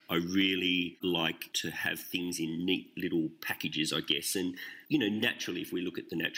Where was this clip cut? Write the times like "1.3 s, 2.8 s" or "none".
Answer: none